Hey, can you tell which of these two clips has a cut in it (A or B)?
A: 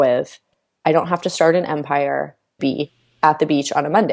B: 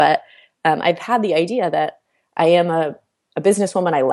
A